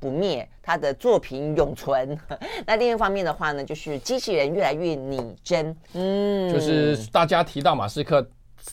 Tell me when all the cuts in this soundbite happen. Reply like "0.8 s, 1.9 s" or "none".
5.9 s